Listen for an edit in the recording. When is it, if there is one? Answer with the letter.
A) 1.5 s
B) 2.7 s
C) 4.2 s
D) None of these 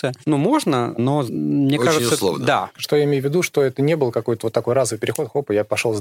B